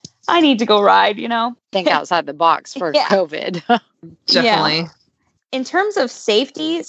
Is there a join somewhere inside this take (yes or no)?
yes